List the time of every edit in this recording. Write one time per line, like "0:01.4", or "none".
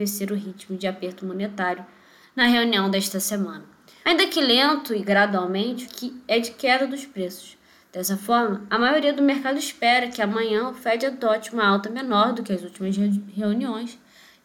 0:04.0
0:05.8